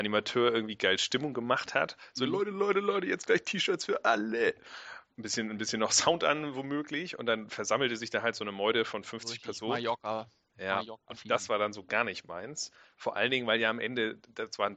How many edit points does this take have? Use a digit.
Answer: 0